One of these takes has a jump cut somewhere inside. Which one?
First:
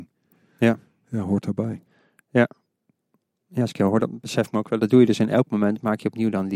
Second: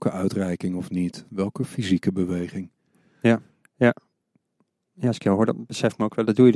second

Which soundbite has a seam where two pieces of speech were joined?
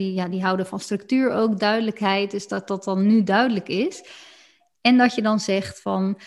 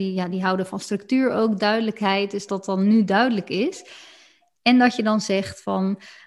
second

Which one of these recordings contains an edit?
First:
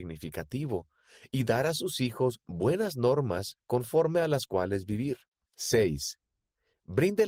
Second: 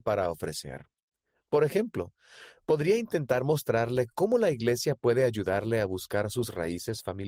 first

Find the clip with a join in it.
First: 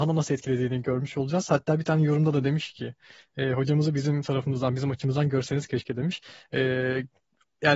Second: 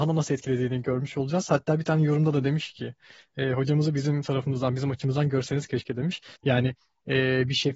second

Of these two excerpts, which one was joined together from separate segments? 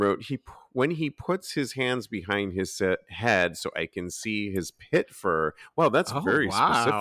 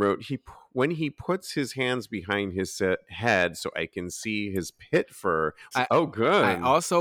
second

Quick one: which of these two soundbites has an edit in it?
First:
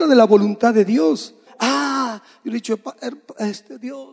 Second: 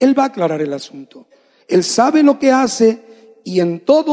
first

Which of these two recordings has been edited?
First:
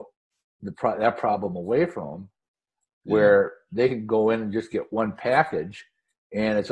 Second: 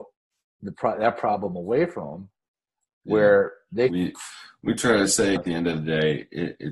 second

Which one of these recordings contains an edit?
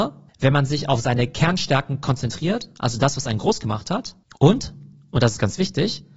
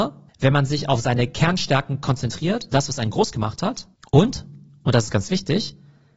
second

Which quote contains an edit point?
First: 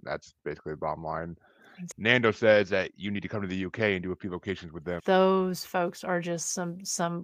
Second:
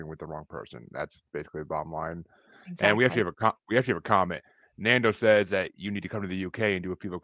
first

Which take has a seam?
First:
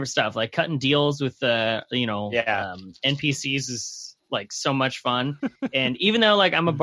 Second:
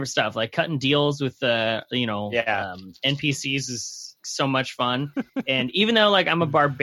second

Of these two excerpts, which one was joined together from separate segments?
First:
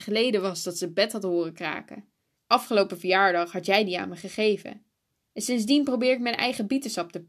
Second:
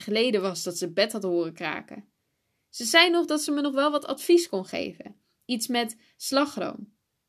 first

